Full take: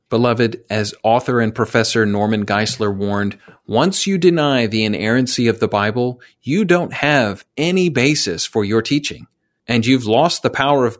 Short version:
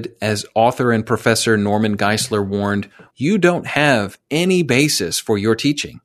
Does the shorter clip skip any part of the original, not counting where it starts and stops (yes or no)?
yes